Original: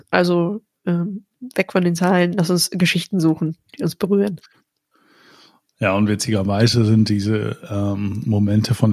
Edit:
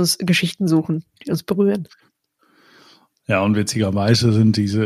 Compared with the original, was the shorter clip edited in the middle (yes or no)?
no